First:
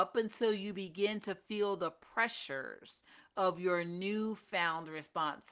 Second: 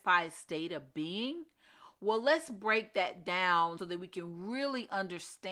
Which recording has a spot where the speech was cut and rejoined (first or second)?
second